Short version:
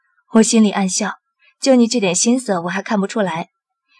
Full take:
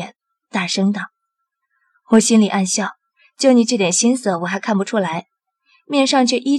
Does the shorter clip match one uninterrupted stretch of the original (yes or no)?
yes